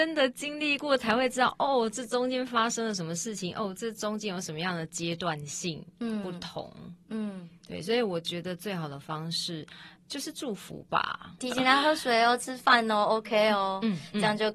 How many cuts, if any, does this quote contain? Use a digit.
1